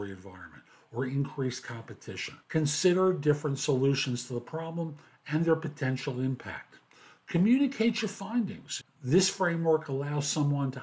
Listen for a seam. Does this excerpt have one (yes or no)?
yes